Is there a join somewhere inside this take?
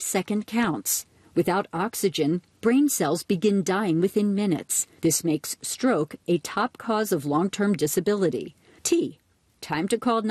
yes; 2 cuts; at 5.0 s, 8.8 s

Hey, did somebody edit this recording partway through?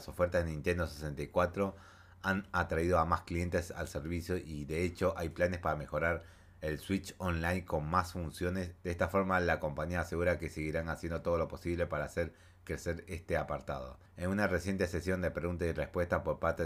yes; 2 cuts; at 8.8 s, 14.1 s

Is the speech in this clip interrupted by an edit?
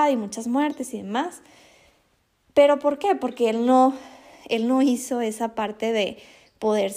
no; 0 cuts

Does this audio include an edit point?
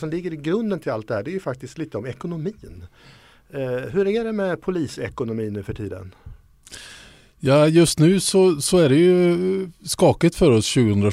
no; 0 cuts

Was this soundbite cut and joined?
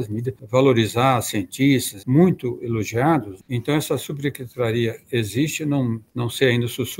yes; 2 cuts; at 2.0 s, 3.5 s

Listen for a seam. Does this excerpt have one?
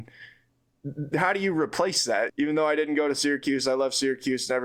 yes; 1 cut; at 2.3 s

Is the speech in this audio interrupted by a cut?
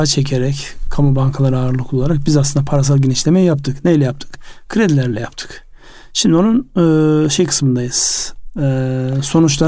no; 0 cuts

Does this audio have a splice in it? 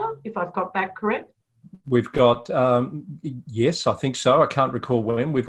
no; 0 cuts

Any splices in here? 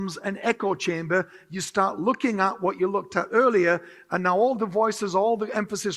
no; 0 cuts

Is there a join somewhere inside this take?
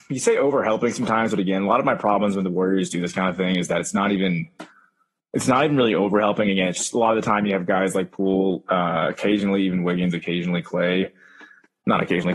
no; 0 cuts

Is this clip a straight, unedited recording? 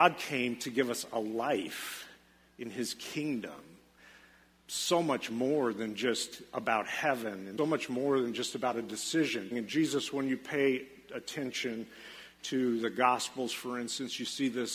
no; 2 cuts; at 7.6 s, 9.5 s

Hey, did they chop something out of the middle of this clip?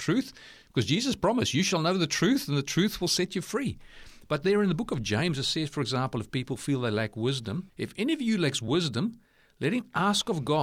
yes; 1 cut; at 7.7 s

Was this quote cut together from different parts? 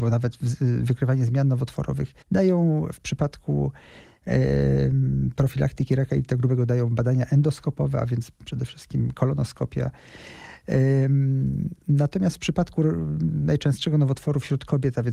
yes; 1 cut; at 2.2 s

